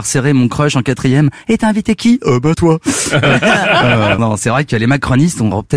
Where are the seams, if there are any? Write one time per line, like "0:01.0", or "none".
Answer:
0:02.5
0:04.2